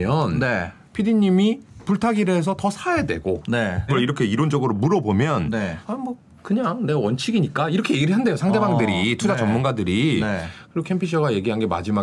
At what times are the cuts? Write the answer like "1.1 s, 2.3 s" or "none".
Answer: 3.9 s, 5.8 s